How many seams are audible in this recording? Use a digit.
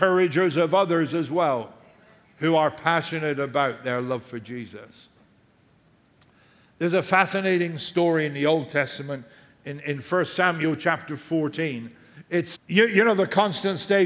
1